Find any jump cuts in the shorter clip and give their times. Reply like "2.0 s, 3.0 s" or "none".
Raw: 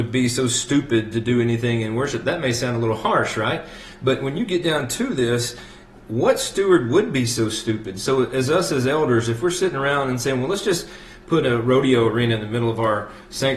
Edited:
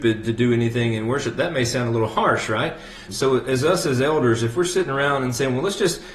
3.1 s